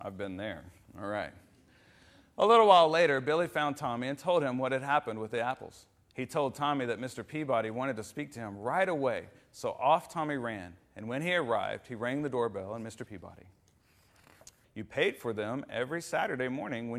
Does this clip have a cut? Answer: yes; 2 cuts; at 13.1 s, 14.6 s

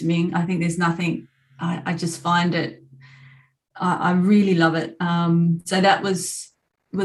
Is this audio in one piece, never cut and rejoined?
yes; 0 cuts

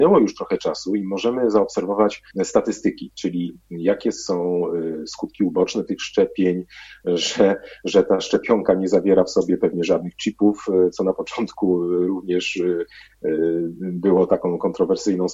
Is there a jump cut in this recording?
yes; 1 cut; at 2.3 s

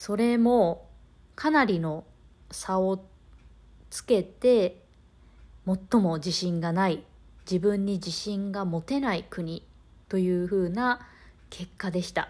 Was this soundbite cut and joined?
no; 0 cuts

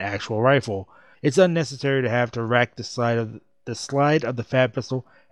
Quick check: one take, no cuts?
no; 1 cut; at 1.1 s

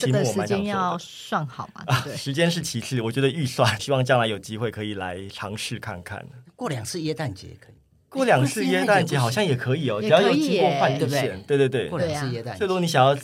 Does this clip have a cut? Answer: yes; 1 cut; at 3.8 s

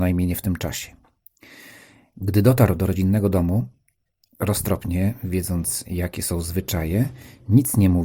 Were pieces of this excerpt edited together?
no; 0 cuts

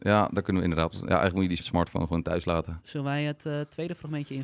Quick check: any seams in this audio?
yes; 1 cut; at 1.6 s

